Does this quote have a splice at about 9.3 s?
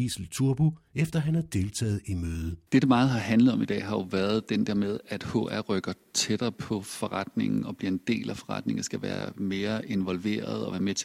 yes; 2 cuts; at 2.7 s, 9.3 s

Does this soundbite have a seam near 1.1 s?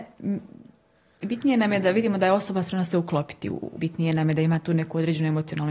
no; 1 cut; at 3.8 s

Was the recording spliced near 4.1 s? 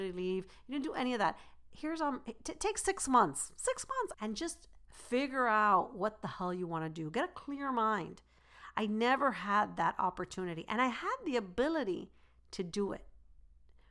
yes; 1 cut; at 4.1 s

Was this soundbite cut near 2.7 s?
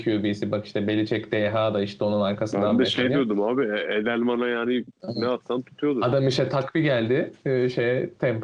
no; 0 cuts

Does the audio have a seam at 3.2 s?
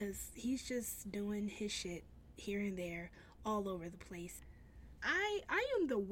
no; 1 cut; at 5.0 s

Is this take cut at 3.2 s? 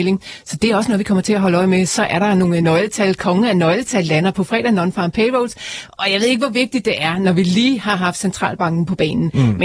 no; 0 cuts

